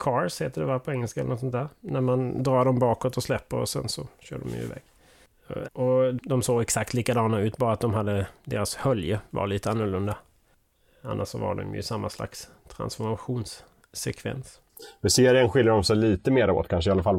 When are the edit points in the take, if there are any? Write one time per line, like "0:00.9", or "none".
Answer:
0:05.6